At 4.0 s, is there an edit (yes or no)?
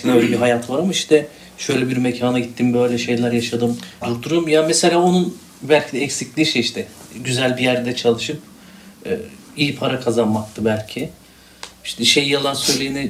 yes